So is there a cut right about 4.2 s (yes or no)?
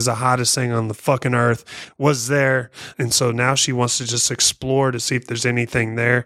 no